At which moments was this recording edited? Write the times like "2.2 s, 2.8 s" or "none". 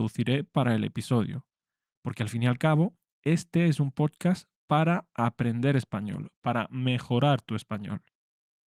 none